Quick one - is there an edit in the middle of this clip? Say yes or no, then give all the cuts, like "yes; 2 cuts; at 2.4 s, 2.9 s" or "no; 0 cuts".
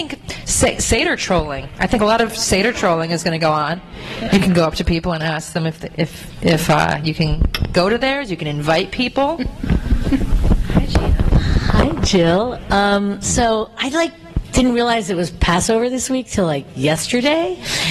no; 0 cuts